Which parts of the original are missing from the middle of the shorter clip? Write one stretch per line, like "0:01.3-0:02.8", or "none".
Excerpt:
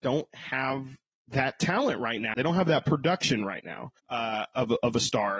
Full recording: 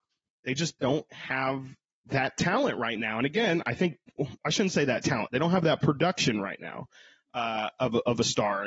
0:03.1-0:05.3
0:06.9-0:07.2

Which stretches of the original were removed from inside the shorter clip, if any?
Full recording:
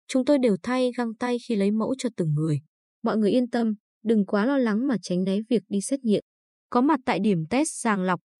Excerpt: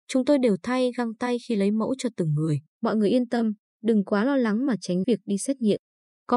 0:02.7-0:02.9
0:05.3-0:05.5

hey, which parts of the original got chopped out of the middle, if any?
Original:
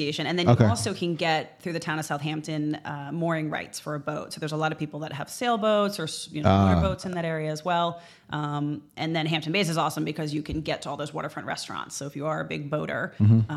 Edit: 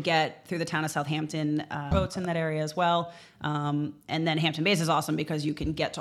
0:03.1-0:06.8

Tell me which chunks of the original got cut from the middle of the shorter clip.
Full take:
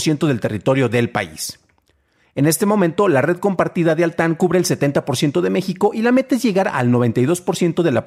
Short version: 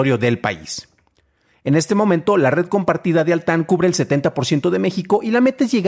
none

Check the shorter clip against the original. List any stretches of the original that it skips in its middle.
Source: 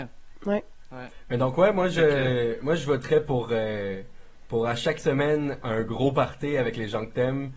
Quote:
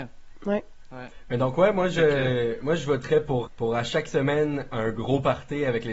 0:03.5-0:04.4

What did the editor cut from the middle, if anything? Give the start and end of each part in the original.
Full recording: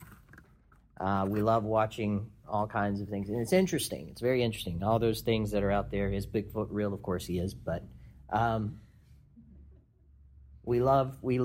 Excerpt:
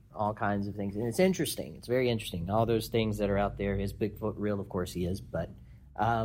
none

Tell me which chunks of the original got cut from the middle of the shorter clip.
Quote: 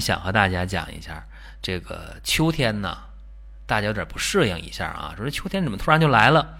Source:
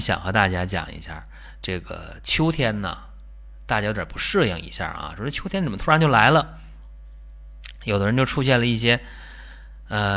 none

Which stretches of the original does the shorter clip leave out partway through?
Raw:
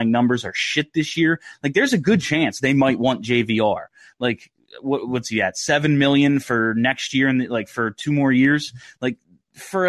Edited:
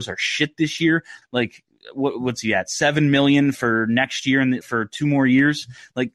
0:01.6-0:04.1
0:07.5-0:07.7

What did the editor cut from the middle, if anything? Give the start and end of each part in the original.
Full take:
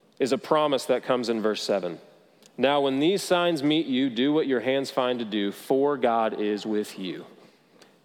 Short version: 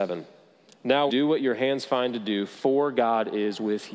0:02.8-0:04.1

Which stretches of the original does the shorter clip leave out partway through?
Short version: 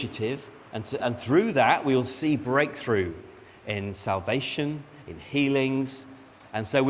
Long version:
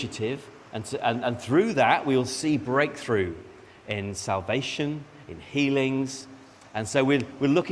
0:01.0-0:01.2

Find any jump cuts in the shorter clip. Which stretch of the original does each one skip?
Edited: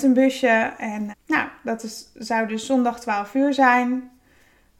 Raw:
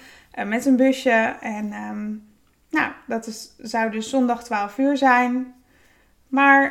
0:01.7-0:02.5

